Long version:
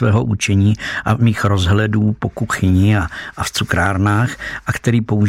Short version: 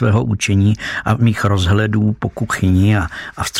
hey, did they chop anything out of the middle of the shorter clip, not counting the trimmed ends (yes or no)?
no